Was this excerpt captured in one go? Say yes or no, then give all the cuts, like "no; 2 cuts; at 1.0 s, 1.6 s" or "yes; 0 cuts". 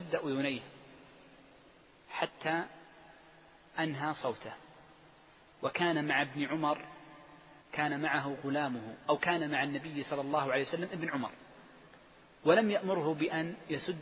no; 1 cut; at 7.6 s